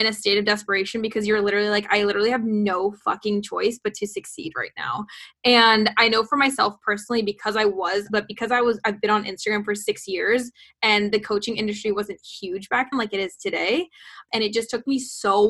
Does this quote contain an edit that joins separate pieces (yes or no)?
yes